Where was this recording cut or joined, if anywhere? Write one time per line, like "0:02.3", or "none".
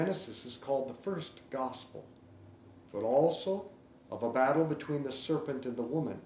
0:02.8